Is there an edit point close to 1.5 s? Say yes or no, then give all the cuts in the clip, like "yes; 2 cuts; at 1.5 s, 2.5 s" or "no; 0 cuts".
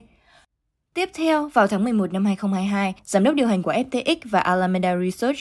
no; 1 cut; at 3.0 s